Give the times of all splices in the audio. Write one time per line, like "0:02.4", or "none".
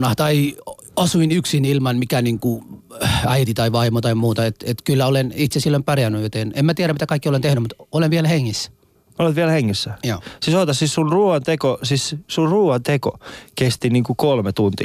none